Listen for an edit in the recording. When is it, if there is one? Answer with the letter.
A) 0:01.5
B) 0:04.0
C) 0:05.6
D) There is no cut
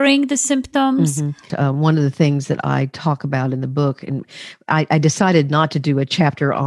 A